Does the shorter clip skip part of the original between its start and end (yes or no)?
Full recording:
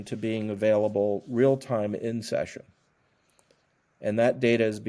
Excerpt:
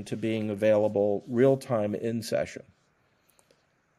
no